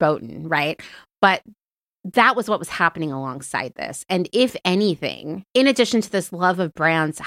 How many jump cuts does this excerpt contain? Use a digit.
1